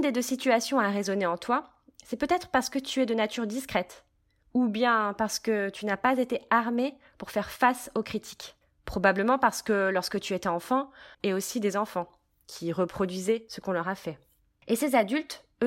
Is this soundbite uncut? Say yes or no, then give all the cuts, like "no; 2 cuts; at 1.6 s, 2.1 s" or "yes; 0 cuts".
no; 1 cut; at 11.1 s